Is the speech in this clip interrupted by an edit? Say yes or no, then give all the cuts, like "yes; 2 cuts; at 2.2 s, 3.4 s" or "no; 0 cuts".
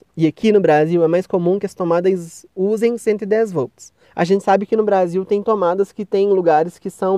no; 0 cuts